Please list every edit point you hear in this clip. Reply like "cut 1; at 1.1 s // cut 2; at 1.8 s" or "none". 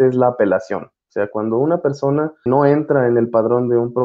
cut 1; at 2.5 s